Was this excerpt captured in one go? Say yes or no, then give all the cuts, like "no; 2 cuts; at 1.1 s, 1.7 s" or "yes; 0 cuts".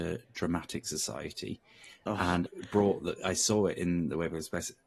no; 1 cut; at 2.5 s